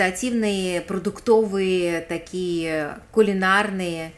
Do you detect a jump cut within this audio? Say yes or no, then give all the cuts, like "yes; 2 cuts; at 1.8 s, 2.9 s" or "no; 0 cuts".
no; 0 cuts